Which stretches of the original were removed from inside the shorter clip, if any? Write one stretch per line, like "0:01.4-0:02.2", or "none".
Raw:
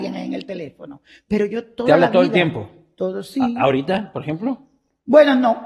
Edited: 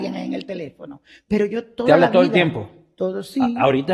none